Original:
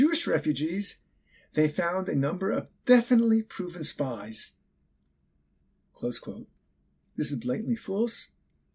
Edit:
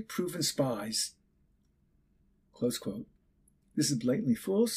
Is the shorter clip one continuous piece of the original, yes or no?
yes